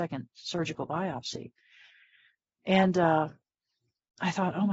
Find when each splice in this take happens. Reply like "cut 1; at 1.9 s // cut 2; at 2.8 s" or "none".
none